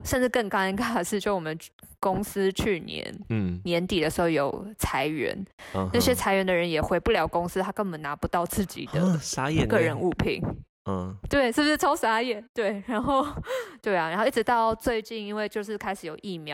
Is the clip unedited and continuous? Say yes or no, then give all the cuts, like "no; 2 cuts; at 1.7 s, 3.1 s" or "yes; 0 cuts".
yes; 0 cuts